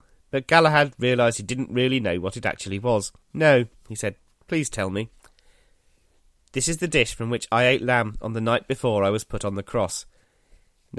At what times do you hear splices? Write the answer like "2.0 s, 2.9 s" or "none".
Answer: 3.2 s

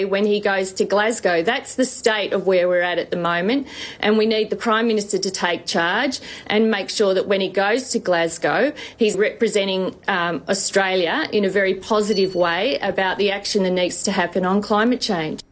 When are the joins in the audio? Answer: 9.1 s

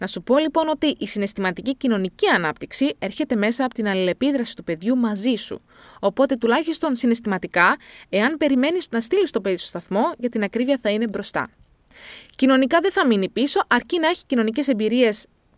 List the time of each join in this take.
none

